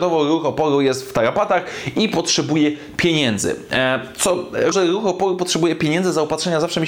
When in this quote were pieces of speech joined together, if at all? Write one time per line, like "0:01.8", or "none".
0:04.7